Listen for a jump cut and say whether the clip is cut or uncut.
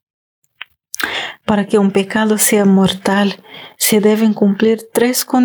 uncut